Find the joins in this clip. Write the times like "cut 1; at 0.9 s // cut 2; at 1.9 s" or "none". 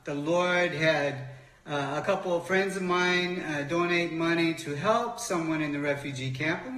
none